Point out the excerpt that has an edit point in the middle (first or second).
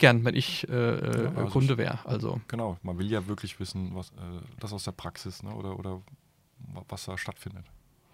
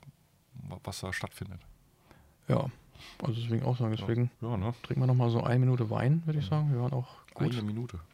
second